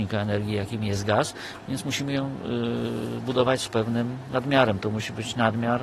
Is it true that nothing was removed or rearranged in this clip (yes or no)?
yes